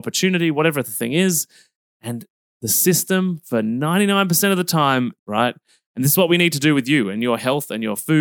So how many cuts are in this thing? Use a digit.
1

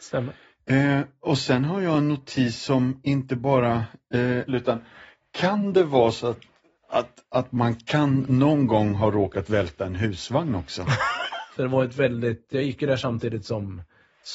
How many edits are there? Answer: 2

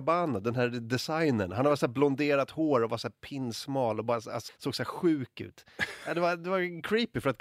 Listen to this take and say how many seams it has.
1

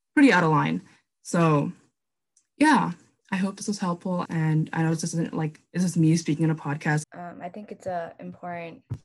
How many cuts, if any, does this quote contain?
2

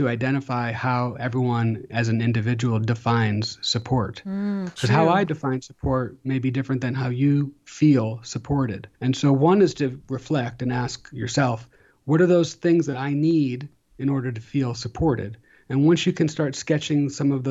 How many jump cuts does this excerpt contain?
2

